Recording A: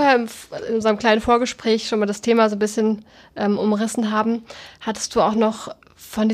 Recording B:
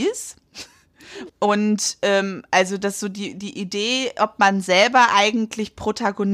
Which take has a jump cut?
B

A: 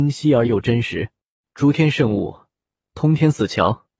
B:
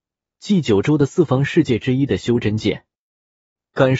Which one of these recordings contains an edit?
A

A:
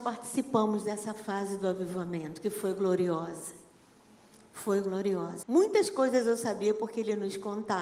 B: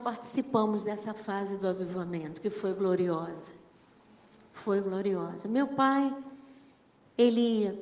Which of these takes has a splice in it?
A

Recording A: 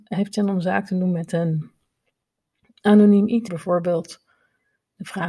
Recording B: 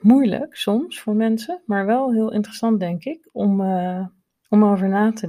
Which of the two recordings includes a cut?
A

